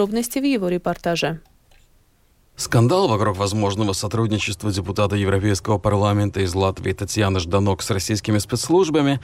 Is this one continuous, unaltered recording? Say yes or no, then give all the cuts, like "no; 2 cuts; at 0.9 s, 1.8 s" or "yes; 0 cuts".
yes; 0 cuts